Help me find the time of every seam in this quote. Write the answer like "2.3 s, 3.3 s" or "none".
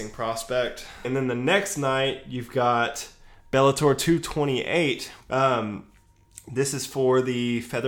1.0 s, 5.2 s